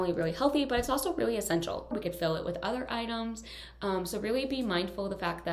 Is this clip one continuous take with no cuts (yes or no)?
no